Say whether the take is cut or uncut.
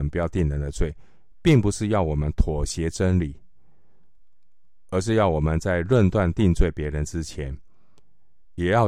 uncut